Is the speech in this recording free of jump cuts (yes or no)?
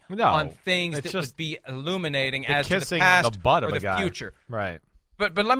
yes